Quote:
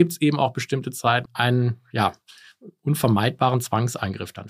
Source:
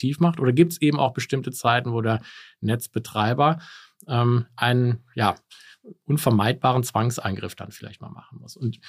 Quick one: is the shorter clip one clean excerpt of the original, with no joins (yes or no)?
no